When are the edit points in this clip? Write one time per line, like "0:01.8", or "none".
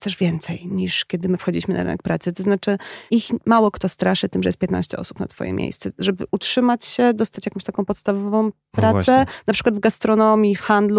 none